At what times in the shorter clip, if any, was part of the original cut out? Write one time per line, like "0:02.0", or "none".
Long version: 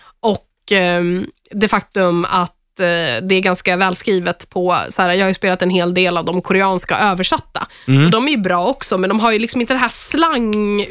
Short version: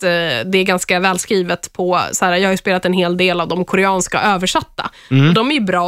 none